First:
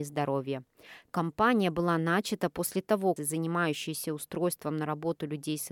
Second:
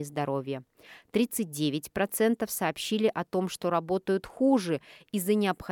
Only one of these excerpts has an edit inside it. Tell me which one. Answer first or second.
first